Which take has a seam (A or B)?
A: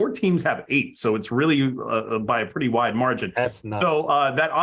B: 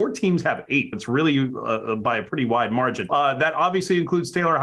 B